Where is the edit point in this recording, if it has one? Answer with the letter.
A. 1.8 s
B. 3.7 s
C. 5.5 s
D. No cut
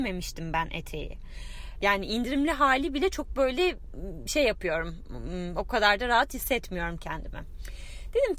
A